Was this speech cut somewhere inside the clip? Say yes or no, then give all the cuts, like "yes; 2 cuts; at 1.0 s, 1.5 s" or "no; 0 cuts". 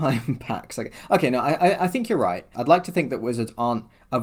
yes; 1 cut; at 2.5 s